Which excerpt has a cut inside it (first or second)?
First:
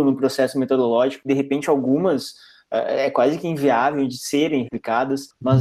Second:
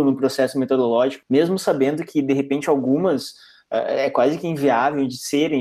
first